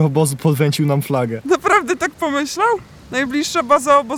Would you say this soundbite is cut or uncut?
uncut